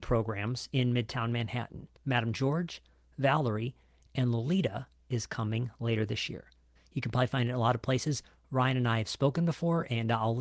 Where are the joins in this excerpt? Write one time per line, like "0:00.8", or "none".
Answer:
0:02.0
0:06.8